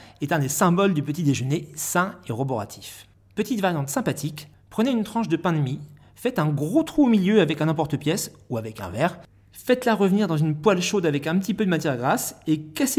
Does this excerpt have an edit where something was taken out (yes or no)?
no